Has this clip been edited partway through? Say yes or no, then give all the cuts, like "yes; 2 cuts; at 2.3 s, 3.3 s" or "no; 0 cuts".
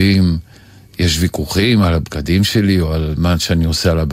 no; 0 cuts